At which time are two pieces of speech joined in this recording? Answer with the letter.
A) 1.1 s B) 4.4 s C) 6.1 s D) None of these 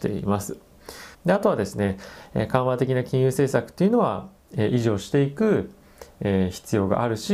A